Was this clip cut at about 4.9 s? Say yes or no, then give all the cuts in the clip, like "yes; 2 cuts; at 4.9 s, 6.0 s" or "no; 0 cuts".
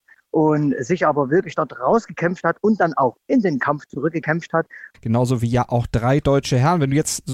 yes; 1 cut; at 4.9 s